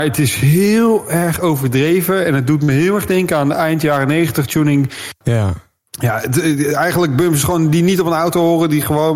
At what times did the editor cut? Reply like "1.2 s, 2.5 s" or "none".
5.2 s